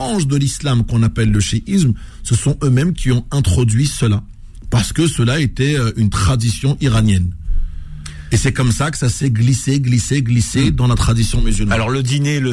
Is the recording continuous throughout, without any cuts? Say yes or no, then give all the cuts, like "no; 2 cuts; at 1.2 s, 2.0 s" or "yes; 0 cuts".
yes; 0 cuts